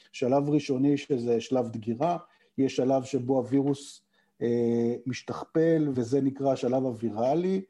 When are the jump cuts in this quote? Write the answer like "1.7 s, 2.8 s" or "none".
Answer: 5.9 s